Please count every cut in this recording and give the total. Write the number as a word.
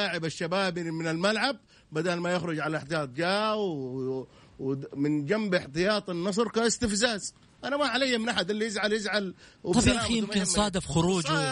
zero